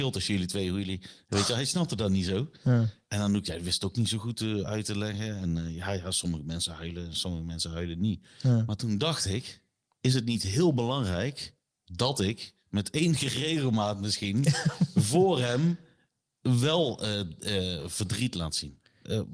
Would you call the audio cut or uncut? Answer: uncut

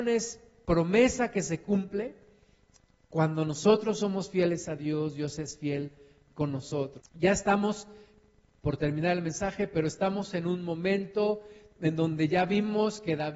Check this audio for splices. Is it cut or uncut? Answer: cut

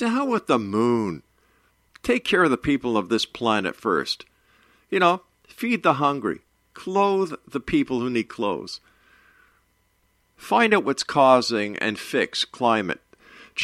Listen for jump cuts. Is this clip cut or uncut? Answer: cut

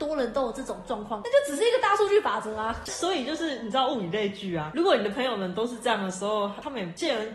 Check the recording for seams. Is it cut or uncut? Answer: uncut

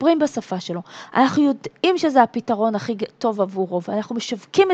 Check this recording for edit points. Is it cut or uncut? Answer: uncut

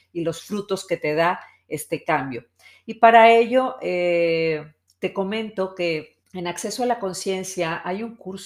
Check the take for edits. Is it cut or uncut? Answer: cut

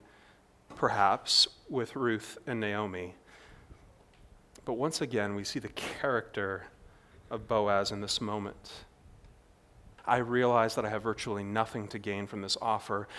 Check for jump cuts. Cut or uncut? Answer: cut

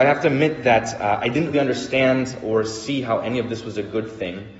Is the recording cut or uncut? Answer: cut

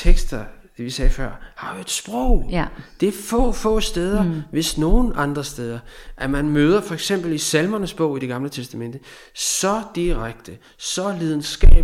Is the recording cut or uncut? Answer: uncut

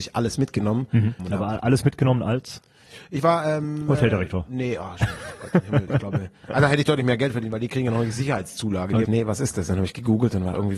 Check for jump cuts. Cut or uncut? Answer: cut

